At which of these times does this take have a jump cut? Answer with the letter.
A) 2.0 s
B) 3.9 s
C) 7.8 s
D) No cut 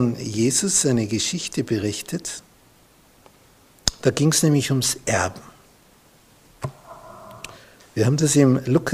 C